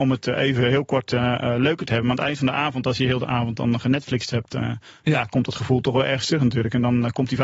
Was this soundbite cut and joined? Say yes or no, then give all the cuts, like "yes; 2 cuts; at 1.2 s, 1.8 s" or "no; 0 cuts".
no; 0 cuts